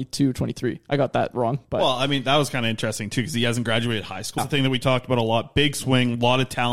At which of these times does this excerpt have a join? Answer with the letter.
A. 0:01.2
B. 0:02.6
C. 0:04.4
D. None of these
C